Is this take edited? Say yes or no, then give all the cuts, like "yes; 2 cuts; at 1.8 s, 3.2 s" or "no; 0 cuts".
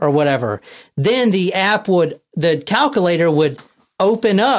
no; 0 cuts